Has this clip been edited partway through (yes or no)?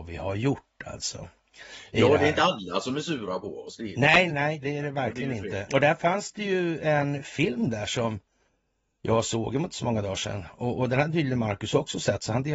yes